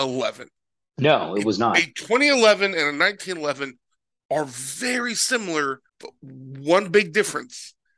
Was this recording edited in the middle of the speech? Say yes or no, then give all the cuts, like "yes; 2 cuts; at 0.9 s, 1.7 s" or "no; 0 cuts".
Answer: yes; 1 cut; at 5.9 s